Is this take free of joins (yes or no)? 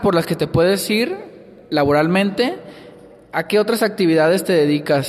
yes